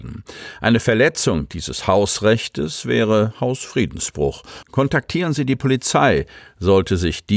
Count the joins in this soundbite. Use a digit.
1